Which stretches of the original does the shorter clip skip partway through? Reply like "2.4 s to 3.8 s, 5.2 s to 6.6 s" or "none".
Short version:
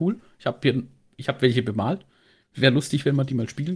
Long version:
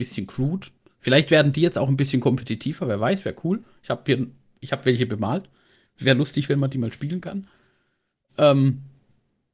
none